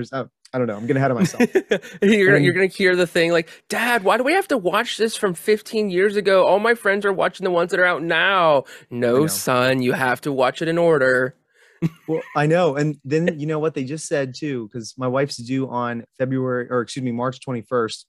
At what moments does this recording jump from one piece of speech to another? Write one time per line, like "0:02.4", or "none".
none